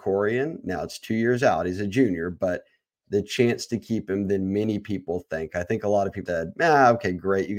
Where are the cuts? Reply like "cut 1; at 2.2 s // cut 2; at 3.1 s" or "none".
cut 1; at 6.3 s

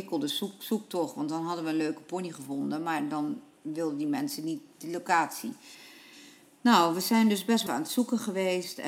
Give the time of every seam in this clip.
cut 1; at 7.7 s

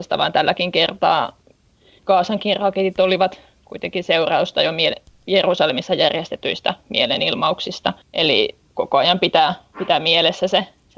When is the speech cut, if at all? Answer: cut 1; at 8.0 s

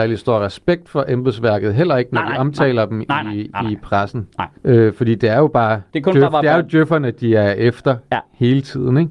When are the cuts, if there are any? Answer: cut 1; at 4.6 s

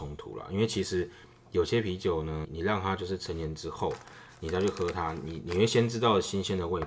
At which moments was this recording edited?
cut 1; at 2.4 s

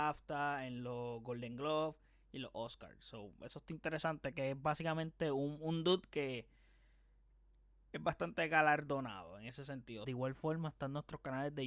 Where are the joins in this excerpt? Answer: cut 1; at 10.0 s

